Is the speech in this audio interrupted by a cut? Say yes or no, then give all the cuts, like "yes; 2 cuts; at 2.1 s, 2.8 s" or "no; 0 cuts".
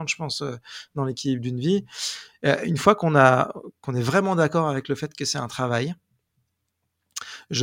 no; 0 cuts